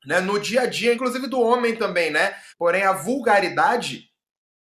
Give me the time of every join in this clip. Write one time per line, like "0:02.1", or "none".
0:00.9
0:02.5